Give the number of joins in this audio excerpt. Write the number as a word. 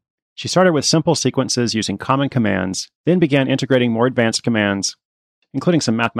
one